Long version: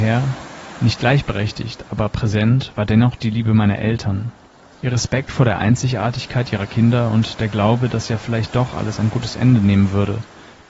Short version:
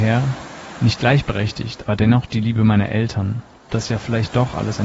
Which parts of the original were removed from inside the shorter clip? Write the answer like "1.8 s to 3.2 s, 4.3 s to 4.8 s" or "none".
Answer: 1.8 s to 2.7 s, 4.6 s to 7.9 s